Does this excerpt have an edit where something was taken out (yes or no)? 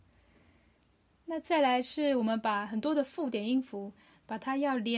no